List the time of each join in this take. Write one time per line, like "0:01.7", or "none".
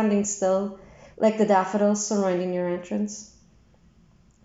0:01.1